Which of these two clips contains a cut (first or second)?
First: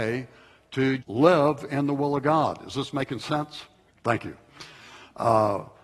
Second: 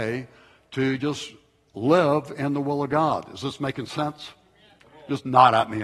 first